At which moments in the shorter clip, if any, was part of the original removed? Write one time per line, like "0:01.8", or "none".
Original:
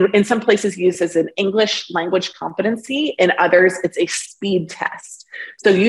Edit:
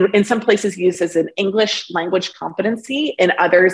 none